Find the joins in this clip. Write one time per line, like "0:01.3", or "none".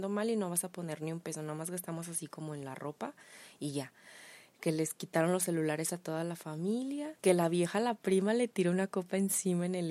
0:07.2